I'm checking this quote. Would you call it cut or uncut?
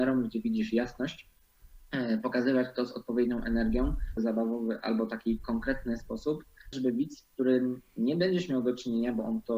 cut